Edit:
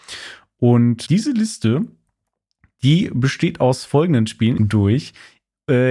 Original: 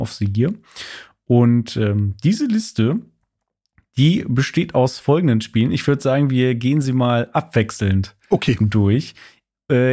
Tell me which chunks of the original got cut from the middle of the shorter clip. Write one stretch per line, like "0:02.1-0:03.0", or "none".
0:01.7-0:02.2
0:05.7-0:08.6